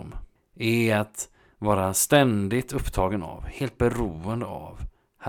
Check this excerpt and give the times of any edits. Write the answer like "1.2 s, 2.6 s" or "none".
none